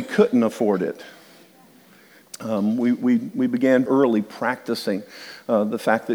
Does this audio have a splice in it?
yes; 2 cuts; at 2.2 s, 3.9 s

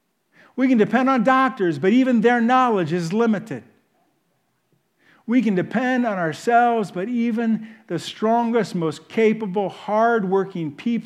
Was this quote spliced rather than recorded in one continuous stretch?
no; 0 cuts

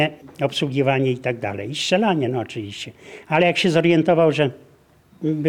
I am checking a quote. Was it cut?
no; 0 cuts

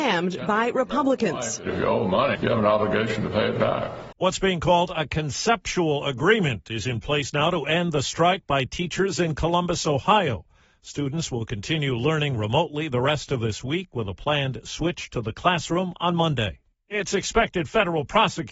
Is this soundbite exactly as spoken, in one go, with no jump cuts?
no; 2 cuts; at 2.4 s, 4.1 s

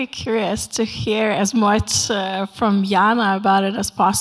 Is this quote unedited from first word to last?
yes; 0 cuts

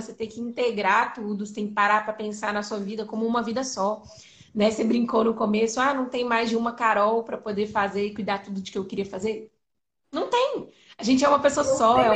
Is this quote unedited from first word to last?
yes; 0 cuts

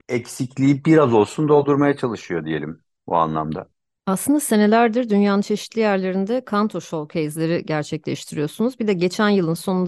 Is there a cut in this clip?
no; 0 cuts

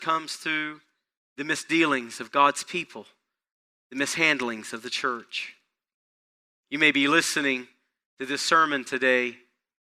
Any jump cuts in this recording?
no; 0 cuts

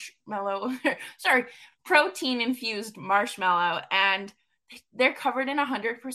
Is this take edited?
no; 0 cuts

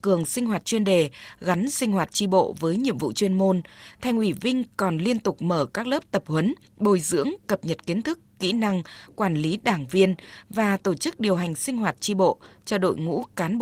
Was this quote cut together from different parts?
no; 0 cuts

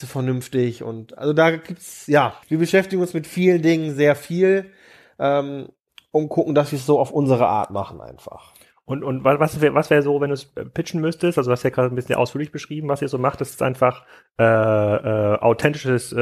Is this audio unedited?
no; 1 cut; at 2.4 s

